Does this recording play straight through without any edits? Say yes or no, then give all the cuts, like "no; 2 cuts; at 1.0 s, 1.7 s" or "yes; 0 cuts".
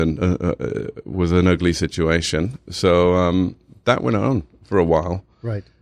yes; 0 cuts